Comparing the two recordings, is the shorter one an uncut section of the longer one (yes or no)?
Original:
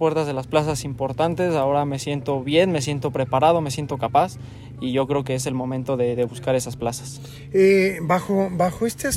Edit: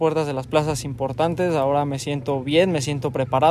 yes